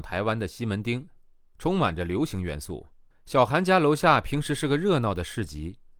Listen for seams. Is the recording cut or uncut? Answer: cut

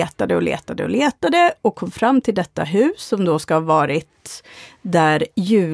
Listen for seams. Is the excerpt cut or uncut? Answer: uncut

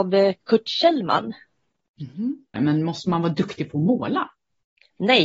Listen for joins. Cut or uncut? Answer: cut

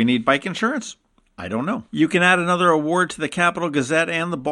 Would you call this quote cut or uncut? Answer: cut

